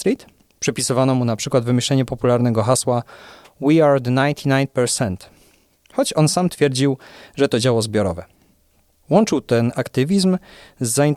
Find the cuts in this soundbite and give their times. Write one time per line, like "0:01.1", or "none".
none